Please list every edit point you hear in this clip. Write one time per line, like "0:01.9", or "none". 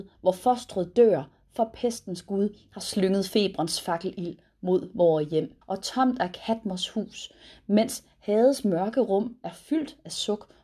0:05.6